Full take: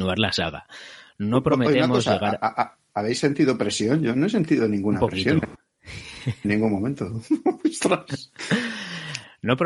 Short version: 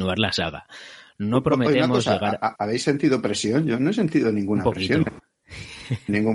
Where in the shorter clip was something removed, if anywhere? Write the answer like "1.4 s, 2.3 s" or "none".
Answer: 2.5 s